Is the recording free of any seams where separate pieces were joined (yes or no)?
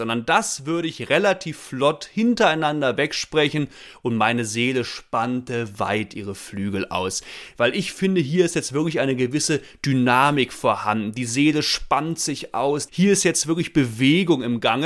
no